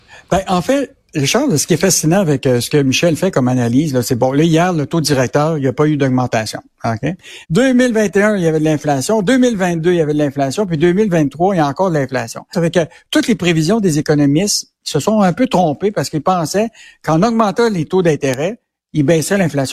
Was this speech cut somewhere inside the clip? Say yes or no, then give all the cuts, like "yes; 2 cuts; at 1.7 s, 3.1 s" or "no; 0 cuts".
yes; 2 cuts; at 7.4 s, 12.5 s